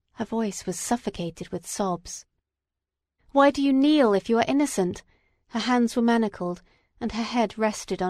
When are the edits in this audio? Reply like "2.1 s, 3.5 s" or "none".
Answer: 3.2 s, 5.4 s